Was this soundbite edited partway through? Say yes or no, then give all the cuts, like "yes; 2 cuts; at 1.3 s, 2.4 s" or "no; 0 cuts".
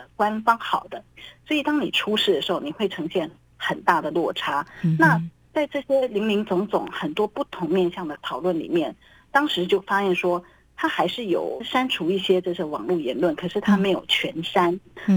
no; 0 cuts